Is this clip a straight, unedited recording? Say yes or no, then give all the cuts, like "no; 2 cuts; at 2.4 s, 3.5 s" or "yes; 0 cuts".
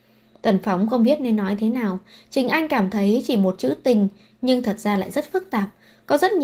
yes; 0 cuts